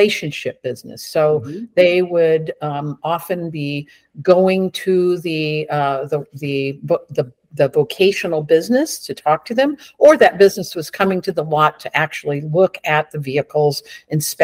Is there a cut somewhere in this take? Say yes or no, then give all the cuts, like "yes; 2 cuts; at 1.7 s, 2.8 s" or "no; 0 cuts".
no; 0 cuts